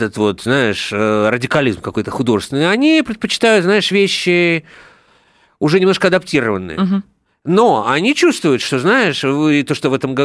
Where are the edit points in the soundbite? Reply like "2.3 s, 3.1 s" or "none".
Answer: none